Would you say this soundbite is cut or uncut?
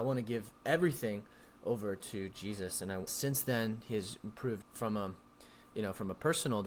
cut